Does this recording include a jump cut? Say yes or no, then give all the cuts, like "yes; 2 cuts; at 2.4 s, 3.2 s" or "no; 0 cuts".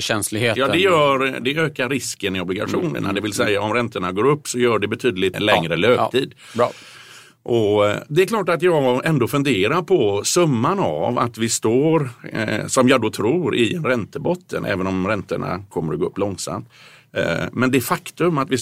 yes; 1 cut; at 5.3 s